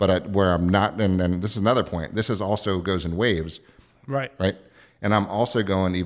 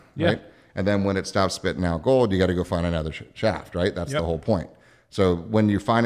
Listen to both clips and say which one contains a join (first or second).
first